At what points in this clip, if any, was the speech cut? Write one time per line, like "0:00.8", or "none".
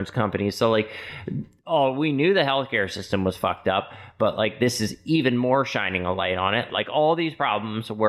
0:06.7